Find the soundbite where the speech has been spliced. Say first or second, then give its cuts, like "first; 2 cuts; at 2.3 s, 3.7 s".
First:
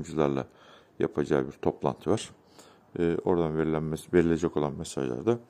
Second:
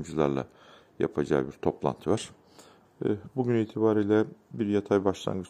second; 1 cut; at 2.9 s